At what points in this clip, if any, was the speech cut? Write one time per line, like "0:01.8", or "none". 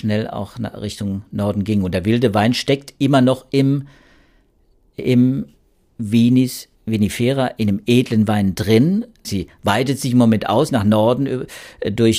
0:06.7
0:09.2